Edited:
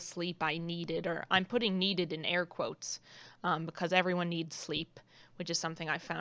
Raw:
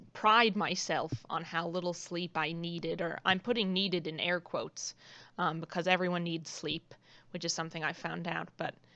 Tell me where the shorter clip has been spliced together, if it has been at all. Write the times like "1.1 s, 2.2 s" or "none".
none